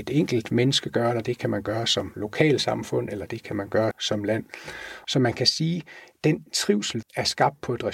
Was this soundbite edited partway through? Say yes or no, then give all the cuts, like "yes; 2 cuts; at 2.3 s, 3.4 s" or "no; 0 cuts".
yes; 3 cuts; at 3.9 s, 5.0 s, 7.0 s